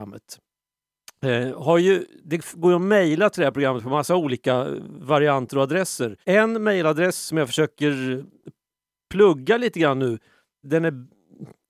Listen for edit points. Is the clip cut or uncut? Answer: cut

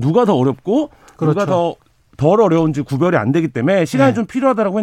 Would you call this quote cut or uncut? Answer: uncut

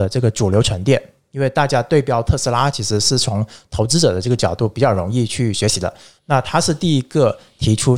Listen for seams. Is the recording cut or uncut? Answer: uncut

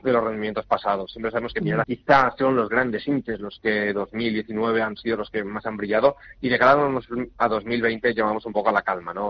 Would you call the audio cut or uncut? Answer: cut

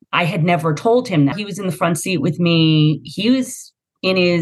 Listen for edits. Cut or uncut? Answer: cut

